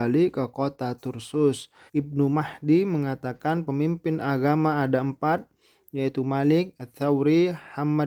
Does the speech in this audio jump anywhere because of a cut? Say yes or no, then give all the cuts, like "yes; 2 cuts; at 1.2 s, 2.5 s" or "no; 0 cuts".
yes; 1 cut; at 1.9 s